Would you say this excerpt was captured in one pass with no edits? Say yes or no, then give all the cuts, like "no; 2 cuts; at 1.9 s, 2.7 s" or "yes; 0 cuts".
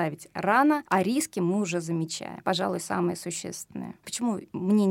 no; 1 cut; at 4.0 s